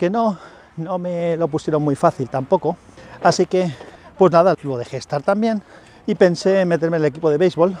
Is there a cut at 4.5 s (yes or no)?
yes